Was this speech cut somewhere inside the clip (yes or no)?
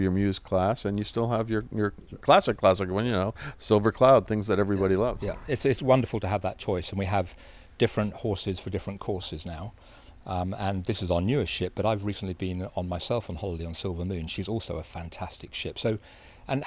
no